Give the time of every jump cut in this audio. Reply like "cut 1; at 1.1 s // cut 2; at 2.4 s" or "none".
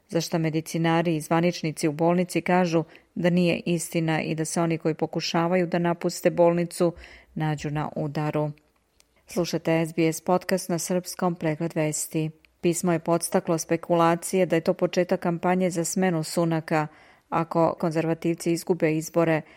cut 1; at 9.2 s // cut 2; at 12.6 s // cut 3; at 17.8 s